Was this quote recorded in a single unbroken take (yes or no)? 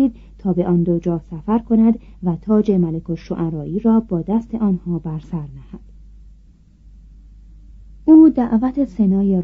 yes